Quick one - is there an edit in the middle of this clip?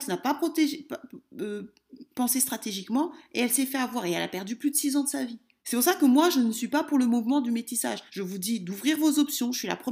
yes; 2 cuts; at 5.6 s, 8.1 s

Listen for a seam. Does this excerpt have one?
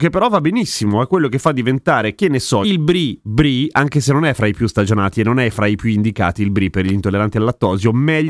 yes; 1 cut; at 2.6 s

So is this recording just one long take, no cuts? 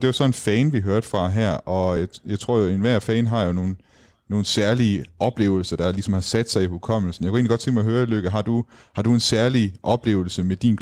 yes; 0 cuts

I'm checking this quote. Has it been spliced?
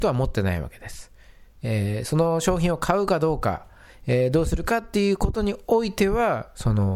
no; 0 cuts

